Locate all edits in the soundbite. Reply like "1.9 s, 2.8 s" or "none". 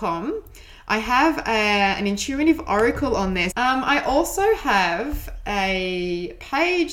3.5 s